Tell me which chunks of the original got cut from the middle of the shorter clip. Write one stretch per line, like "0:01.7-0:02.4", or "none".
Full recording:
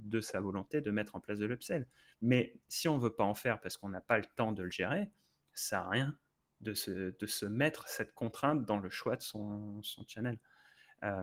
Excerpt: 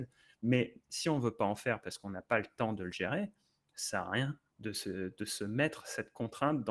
0:06.3-0:06.5